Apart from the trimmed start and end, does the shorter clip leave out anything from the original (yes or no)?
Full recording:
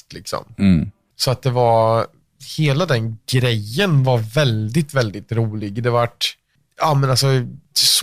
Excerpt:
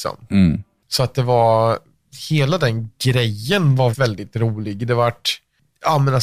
yes